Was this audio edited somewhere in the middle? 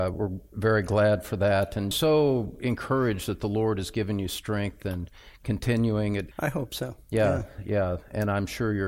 yes; 2 cuts; at 1.9 s, 6.3 s

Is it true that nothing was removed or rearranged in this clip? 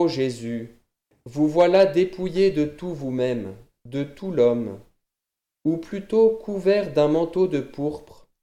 yes; 0 cuts

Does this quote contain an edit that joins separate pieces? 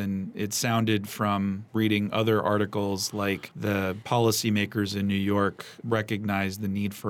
no; 0 cuts

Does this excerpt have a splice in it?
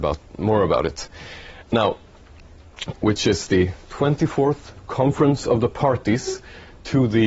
yes; 2 cuts; at 1.6 s, 2.9 s

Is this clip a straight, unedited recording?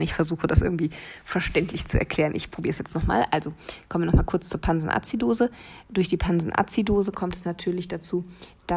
yes; 0 cuts

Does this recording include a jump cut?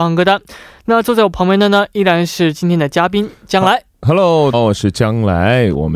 yes; 1 cut; at 4.5 s

